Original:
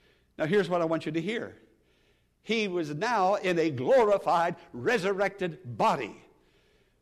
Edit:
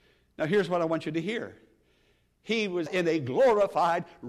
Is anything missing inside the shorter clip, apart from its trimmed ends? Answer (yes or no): yes